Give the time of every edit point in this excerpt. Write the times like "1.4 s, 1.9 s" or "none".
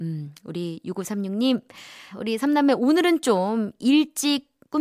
2.1 s